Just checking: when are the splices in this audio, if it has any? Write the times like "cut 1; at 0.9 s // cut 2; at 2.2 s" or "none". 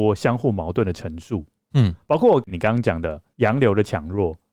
none